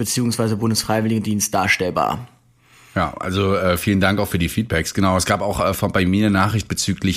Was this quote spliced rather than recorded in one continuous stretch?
no; 0 cuts

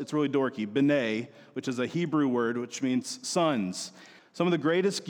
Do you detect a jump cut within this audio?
yes; 1 cut; at 4.2 s

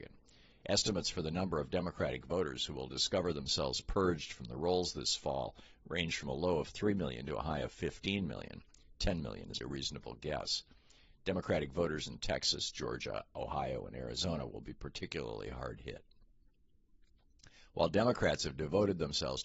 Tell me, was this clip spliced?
yes; 1 cut; at 9.6 s

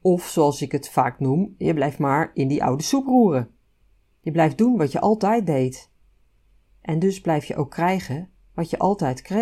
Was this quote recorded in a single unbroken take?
yes; 0 cuts

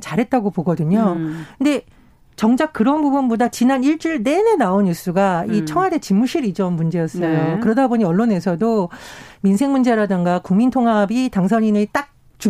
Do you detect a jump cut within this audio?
no; 0 cuts

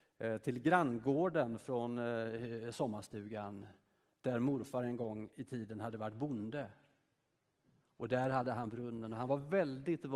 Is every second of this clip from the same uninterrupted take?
yes; 0 cuts

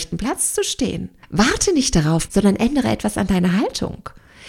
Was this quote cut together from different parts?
yes; 2 cuts; at 1.2 s, 2.3 s

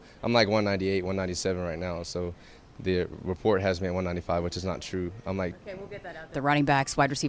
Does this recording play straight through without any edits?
no; 1 cut; at 6.3 s

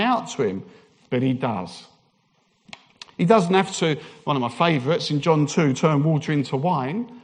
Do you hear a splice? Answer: no; 0 cuts

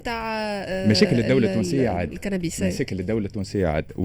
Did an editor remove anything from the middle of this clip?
no; 0 cuts

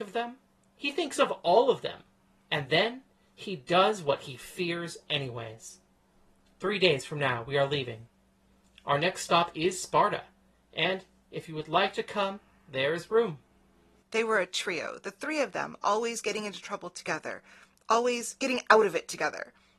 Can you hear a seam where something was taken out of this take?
yes; 1 cut; at 14.0 s

